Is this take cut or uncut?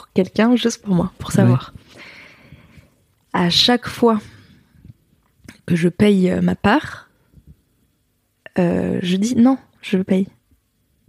cut